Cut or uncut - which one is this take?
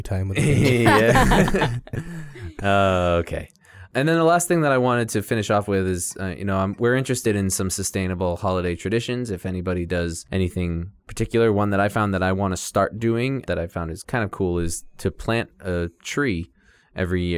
uncut